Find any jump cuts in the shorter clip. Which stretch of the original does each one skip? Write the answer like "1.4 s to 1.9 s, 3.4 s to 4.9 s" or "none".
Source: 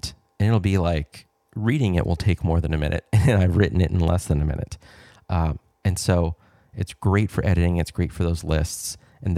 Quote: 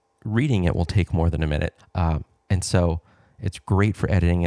3.1 s to 5.1 s